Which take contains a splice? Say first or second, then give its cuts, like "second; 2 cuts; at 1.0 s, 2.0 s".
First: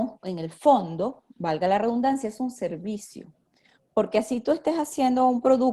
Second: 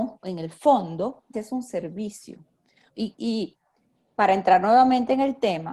second; 2 cuts; at 1.3 s, 2.9 s